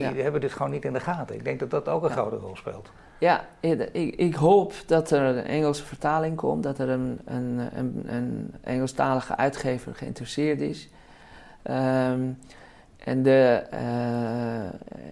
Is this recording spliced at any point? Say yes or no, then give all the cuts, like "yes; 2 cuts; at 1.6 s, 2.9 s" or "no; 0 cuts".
no; 0 cuts